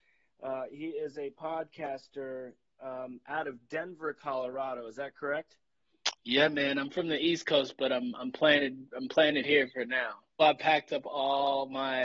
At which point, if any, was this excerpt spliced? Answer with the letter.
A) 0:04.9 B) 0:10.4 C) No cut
B